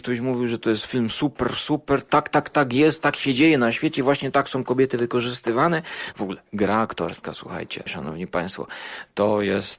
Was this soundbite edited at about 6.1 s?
yes; 2 cuts; at 6.1 s, 7.9 s

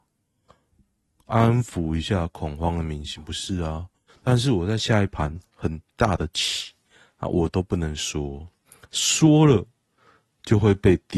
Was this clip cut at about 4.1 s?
yes; 1 cut; at 4.1 s

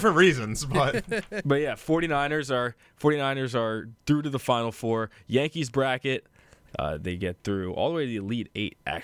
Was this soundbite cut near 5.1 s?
no; 1 cut; at 6.7 s

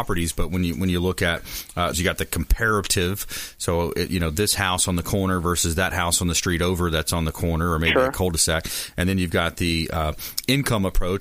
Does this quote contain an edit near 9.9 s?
no; 1 cut; at 1.9 s

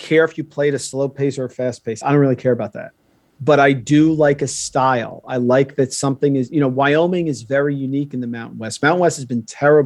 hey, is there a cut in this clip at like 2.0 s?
no; 0 cuts

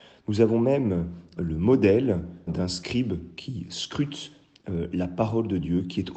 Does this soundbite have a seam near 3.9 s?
no; 2 cuts; at 1.4 s, 2.5 s

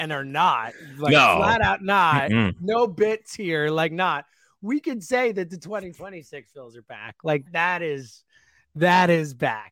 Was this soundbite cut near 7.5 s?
yes; 1 cut; at 7.5 s

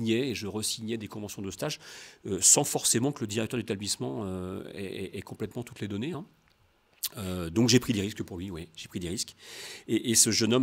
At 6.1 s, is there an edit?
no; 0 cuts

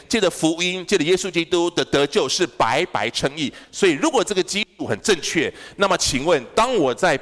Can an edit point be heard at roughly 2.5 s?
no; 0 cuts

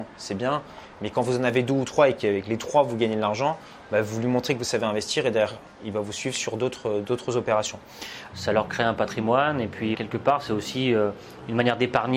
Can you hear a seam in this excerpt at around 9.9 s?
yes; 2 cuts; at 8.3 s, 9.9 s

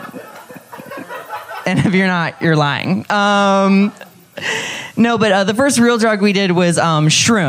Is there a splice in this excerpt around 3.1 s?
no; 0 cuts

